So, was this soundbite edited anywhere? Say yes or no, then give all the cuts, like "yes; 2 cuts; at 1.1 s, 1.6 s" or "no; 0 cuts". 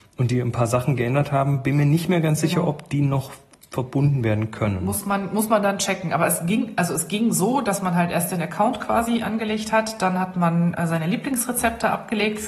no; 0 cuts